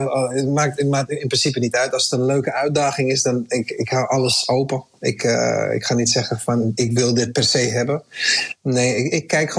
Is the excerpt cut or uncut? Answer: uncut